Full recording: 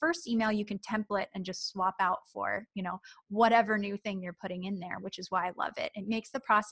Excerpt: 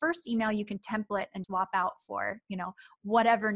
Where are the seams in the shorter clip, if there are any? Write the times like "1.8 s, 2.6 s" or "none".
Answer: 1.4 s